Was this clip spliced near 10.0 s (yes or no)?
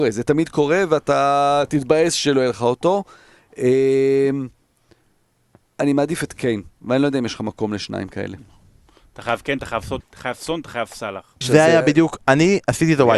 yes